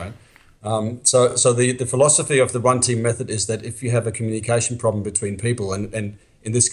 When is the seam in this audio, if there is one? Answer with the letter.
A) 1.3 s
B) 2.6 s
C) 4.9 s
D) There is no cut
D